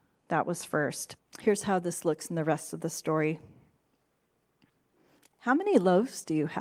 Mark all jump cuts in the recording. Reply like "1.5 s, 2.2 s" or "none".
1.2 s

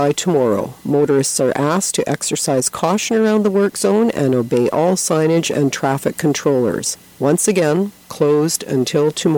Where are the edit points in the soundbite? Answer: 8.0 s

